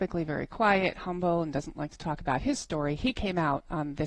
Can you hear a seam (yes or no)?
no